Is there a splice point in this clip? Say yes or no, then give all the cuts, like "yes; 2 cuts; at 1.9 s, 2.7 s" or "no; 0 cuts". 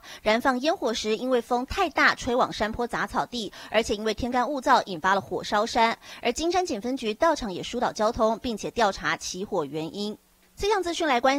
no; 0 cuts